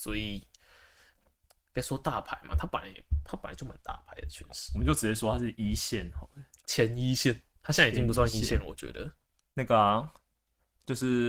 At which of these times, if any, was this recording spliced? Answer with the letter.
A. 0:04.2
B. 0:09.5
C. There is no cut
B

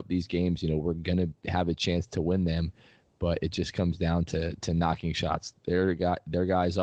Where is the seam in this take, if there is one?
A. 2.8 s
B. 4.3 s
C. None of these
C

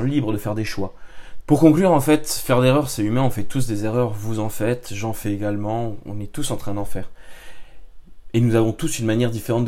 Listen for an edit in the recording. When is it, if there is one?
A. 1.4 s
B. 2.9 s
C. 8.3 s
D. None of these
A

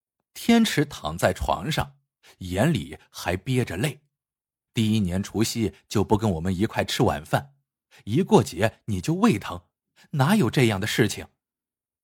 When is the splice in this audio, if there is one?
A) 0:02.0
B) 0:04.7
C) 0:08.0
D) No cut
B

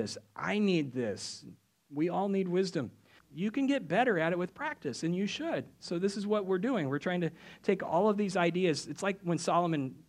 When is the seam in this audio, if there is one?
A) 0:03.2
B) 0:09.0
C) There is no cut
A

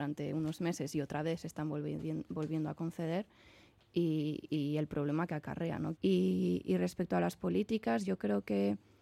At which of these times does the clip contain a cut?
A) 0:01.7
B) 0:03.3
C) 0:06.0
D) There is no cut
C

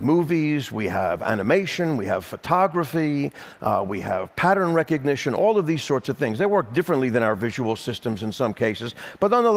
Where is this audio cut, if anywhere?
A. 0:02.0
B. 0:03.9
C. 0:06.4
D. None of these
D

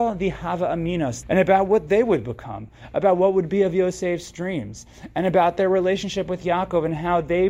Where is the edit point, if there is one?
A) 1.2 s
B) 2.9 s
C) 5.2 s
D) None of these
A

